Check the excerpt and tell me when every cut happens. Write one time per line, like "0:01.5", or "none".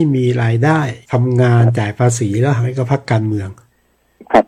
0:01.0